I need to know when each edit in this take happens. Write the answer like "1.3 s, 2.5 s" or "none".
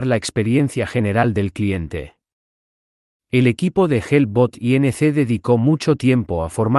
3.2 s